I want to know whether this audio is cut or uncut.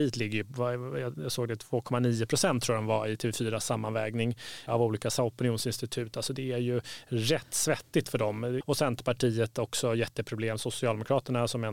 cut